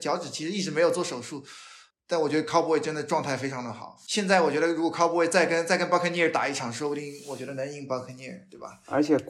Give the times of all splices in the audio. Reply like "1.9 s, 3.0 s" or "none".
none